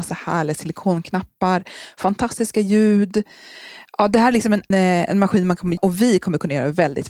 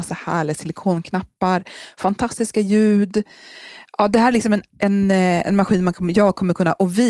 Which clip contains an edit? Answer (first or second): first